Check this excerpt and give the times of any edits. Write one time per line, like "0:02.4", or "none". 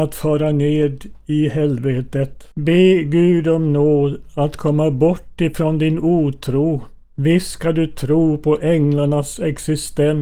0:02.5